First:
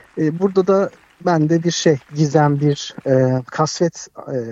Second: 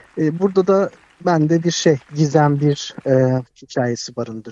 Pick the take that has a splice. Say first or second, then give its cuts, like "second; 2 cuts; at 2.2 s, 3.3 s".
second; 1 cut; at 3.5 s